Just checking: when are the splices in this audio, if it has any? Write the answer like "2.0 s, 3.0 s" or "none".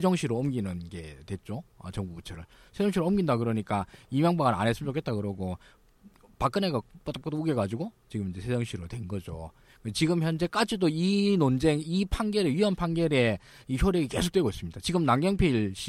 none